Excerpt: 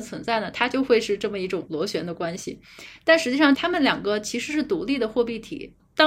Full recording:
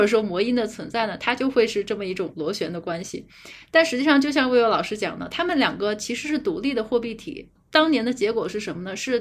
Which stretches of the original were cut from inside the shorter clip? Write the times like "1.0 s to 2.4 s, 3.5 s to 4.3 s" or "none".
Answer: 4.2 s to 5.3 s